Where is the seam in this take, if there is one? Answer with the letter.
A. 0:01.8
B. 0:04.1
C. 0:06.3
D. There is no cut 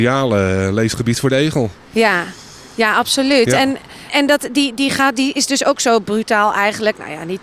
B